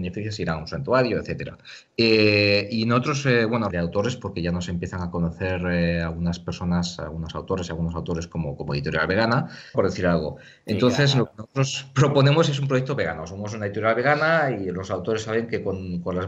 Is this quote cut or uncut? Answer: cut